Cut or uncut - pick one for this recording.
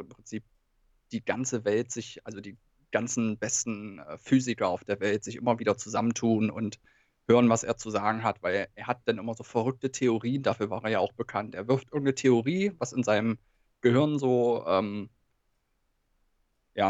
uncut